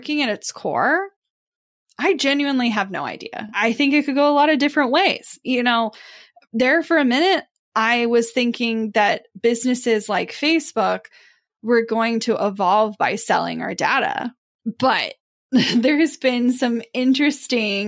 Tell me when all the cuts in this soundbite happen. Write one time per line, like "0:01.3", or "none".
none